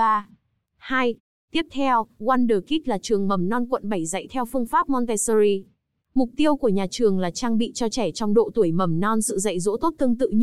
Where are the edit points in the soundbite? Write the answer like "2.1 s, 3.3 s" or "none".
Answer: 1.3 s